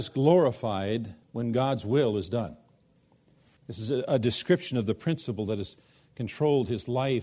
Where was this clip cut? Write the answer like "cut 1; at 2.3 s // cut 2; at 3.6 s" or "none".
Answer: cut 1; at 1.2 s // cut 2; at 3.6 s